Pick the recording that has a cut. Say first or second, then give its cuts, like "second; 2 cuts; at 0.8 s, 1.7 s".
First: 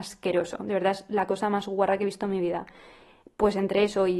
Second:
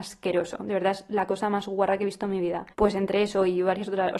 second; 1 cut; at 2.7 s